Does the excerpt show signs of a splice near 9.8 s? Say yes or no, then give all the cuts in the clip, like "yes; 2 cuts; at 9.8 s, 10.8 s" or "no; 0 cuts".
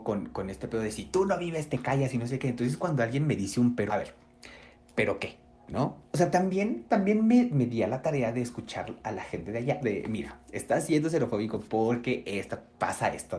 yes; 2 cuts; at 3.9 s, 9.8 s